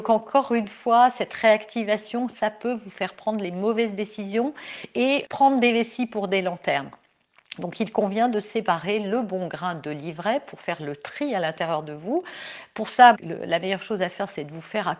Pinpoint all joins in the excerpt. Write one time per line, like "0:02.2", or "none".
0:13.1